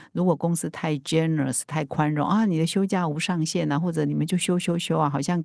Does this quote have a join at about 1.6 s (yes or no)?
no